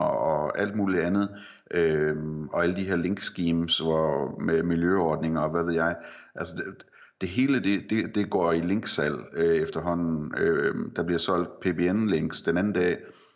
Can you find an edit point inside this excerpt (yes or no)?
no